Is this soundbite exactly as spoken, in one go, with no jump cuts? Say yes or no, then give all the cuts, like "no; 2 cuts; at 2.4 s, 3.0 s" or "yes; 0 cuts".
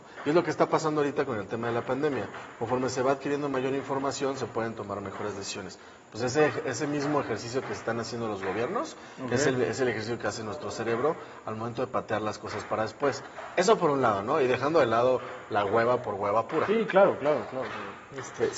yes; 0 cuts